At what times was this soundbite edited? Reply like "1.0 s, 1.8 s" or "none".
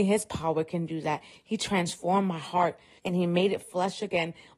3.0 s